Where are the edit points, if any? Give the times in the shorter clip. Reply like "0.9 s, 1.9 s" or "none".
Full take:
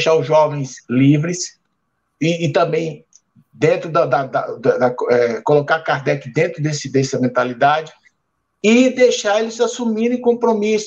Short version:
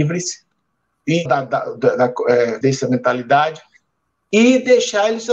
1.3 s, 2.6 s

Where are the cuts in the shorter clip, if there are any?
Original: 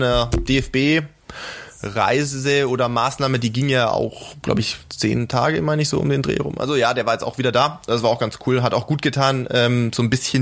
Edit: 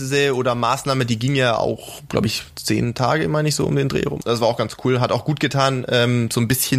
4.2 s

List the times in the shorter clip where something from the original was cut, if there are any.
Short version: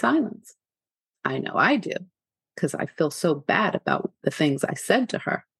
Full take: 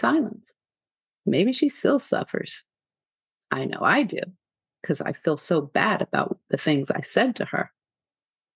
1.1 s

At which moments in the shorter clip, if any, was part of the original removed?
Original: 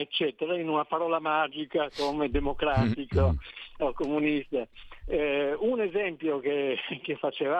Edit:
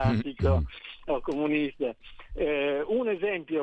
none

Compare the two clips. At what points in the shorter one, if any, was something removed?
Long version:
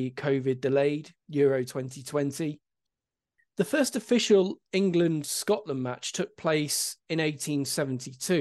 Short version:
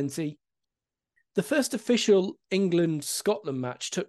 none

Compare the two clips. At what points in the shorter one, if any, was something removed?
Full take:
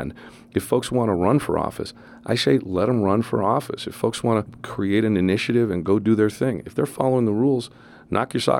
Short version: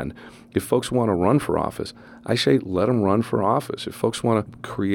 none

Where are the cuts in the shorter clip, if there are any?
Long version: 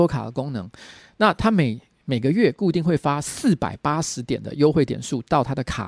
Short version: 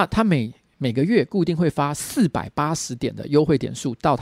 none

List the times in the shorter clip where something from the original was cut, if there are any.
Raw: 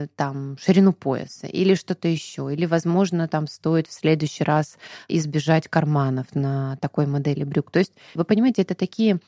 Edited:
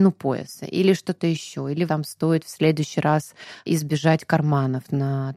1.9 s

